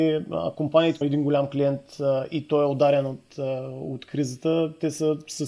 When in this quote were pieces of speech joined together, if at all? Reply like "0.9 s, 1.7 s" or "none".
1.0 s